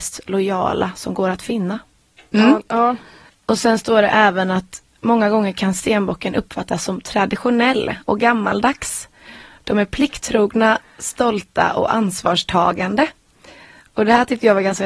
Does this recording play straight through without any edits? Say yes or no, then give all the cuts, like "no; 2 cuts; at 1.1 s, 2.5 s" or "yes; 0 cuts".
yes; 0 cuts